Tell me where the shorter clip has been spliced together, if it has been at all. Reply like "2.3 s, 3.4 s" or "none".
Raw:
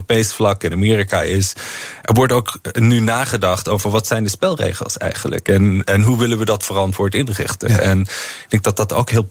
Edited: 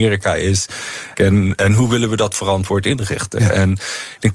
1.1 s